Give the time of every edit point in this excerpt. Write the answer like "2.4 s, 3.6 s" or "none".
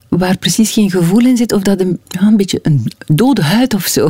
2.0 s